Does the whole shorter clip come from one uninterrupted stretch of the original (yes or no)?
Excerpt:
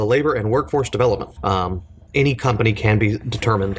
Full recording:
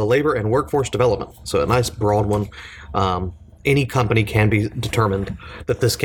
no